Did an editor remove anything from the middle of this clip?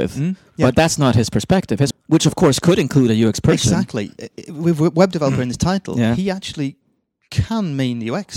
yes; 1 cut; at 1.9 s

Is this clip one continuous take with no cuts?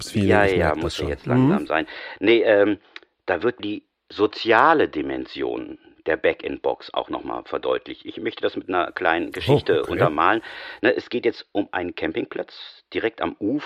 yes; 0 cuts

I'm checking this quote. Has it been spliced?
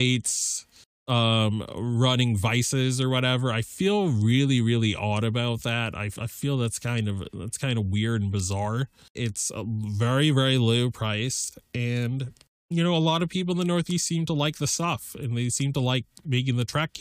yes; 1 cut; at 9.1 s

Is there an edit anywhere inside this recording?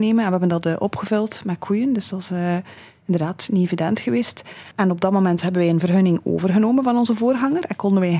yes; 1 cut; at 4.7 s

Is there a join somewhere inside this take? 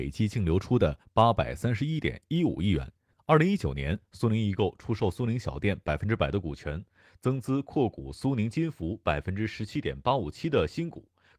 yes; 1 cut; at 3.1 s

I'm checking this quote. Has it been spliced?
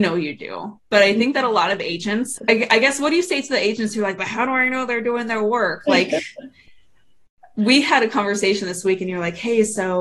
yes; 1 cut; at 2.4 s

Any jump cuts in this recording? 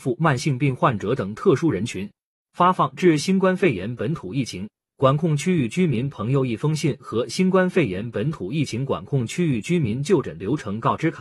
no; 0 cuts

